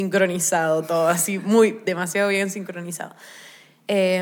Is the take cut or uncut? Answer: uncut